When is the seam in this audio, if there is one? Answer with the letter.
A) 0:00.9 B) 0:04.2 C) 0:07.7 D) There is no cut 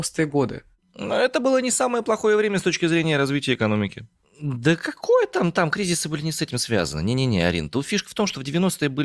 B